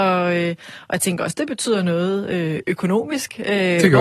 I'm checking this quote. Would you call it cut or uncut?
uncut